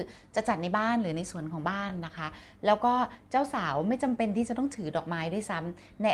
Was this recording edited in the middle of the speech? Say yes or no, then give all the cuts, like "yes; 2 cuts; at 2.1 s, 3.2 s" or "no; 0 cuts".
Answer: no; 0 cuts